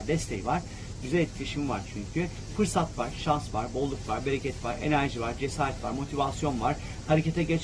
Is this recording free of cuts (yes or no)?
no